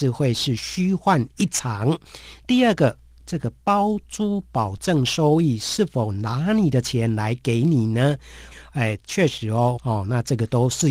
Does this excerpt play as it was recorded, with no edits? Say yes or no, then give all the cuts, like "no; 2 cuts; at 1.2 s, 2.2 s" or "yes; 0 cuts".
no; 2 cuts; at 8.5 s, 9.8 s